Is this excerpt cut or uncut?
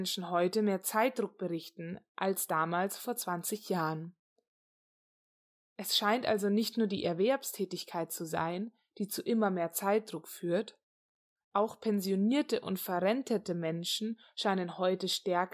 uncut